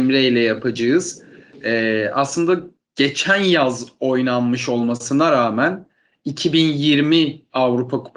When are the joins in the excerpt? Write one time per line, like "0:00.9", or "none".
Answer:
none